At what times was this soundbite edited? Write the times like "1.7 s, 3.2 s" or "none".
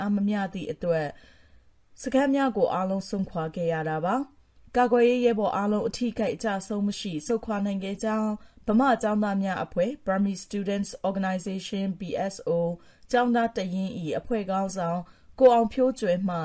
none